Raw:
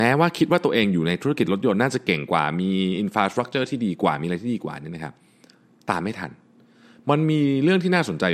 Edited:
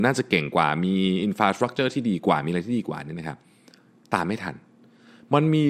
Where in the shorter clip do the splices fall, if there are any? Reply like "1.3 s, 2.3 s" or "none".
none